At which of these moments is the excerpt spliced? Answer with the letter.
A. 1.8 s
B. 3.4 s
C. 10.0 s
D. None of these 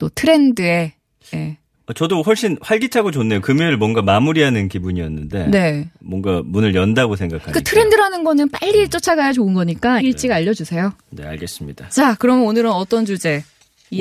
C